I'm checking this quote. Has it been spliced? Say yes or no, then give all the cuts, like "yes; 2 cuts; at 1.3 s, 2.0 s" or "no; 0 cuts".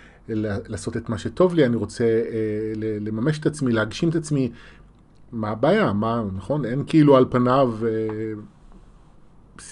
no; 0 cuts